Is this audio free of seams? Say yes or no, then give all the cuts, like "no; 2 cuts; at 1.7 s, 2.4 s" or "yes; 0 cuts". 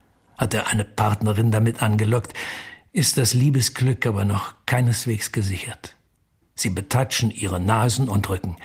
no; 1 cut; at 6.4 s